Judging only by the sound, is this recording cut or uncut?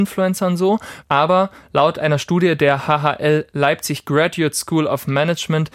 cut